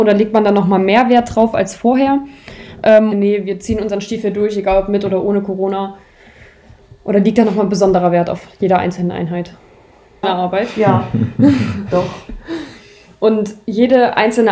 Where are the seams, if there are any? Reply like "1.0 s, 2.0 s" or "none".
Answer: 3.1 s, 10.2 s